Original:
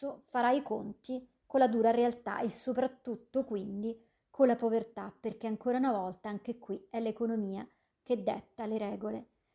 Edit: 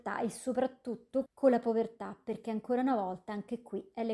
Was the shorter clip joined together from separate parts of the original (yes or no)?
yes